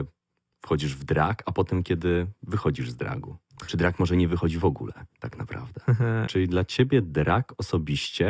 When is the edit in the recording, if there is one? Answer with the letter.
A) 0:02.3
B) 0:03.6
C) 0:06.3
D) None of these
C